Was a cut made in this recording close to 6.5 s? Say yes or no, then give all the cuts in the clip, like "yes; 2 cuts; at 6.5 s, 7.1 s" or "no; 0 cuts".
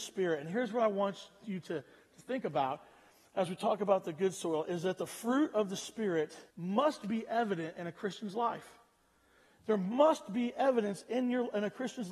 yes; 1 cut; at 6.5 s